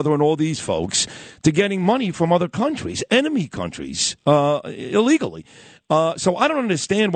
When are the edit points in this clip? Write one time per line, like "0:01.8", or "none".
none